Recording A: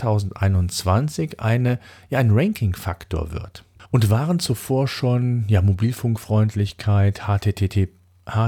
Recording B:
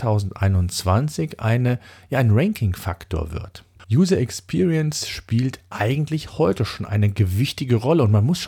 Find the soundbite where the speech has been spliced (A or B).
B